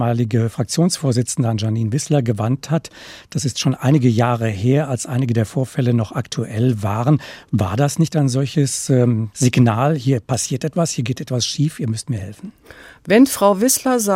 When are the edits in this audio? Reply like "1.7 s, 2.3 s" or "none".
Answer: 9.3 s